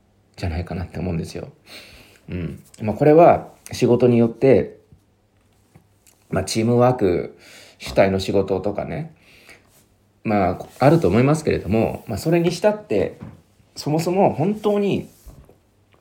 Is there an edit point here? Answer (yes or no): no